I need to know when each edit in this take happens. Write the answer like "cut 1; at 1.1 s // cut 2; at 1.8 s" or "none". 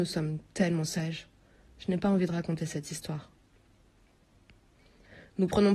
none

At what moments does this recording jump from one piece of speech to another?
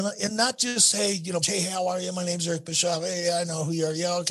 cut 1; at 1.4 s

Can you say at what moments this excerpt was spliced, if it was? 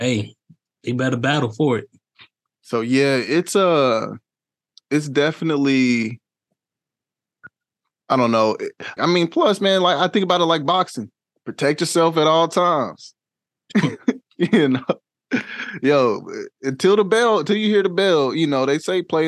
cut 1; at 9.0 s

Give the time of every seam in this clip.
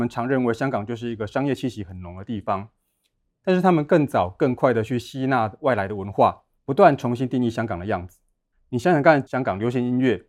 cut 1; at 6.6 s // cut 2; at 9.3 s

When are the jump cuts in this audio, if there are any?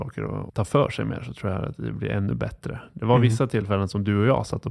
none

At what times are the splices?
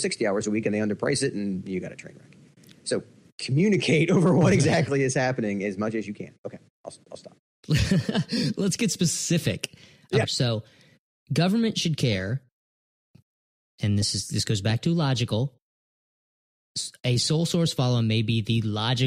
cut 1; at 10.2 s

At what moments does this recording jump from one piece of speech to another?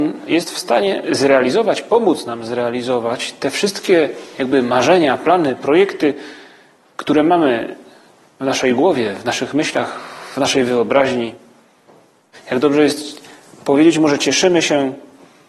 cut 1; at 12.3 s

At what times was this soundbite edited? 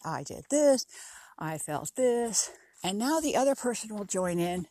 cut 1; at 2.7 s

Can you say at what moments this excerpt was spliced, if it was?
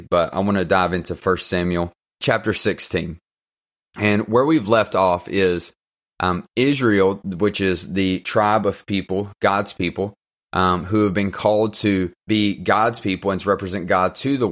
cut 1; at 12.3 s

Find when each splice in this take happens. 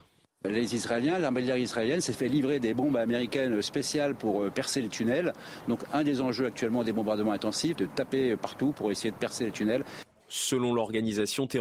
cut 1; at 7.7 s // cut 2; at 10.2 s

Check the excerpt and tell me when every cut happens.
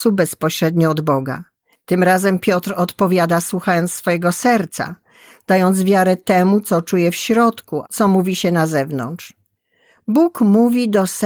cut 1; at 1.7 s // cut 2; at 7.8 s

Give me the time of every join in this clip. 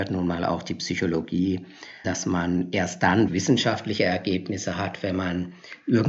cut 1; at 2.0 s // cut 2; at 3.3 s

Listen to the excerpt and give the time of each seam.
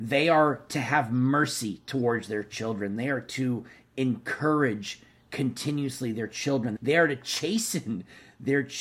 cut 1; at 3.0 s // cut 2; at 6.8 s

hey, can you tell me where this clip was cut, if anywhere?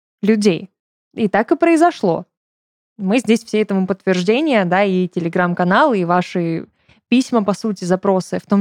none

